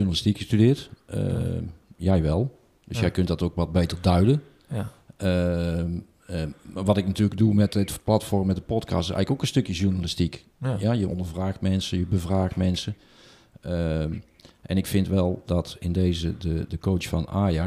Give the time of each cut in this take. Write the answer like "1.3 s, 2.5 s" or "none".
16.7 s